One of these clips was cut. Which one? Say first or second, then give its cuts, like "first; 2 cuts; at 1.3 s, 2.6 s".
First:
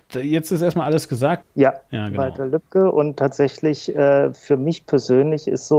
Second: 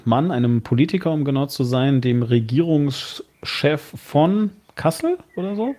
first; 1 cut; at 1.4 s